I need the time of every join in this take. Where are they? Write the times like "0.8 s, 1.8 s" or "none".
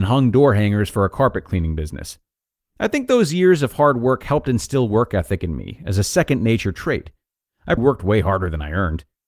7.8 s